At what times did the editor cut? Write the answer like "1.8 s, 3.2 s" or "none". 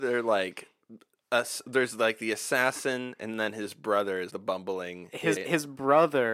4.3 s, 5.4 s